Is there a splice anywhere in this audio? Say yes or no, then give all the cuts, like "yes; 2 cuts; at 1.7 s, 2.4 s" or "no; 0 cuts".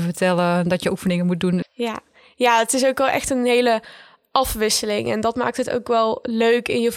yes; 1 cut; at 1.6 s